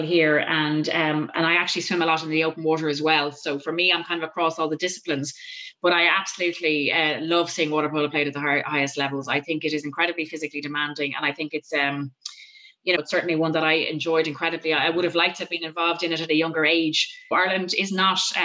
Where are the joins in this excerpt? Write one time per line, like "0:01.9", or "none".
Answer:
0:12.9
0:17.3